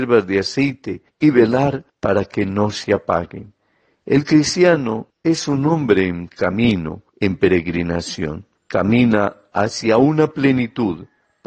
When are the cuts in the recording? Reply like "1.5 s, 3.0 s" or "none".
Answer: 8.6 s